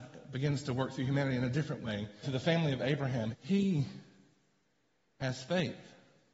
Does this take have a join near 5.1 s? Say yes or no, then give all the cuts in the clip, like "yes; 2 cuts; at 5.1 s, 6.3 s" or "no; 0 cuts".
no; 2 cuts; at 2.2 s, 3.3 s